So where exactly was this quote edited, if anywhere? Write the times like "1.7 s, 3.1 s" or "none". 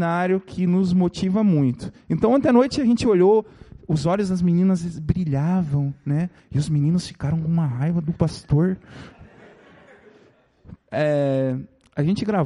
6.4 s, 10.8 s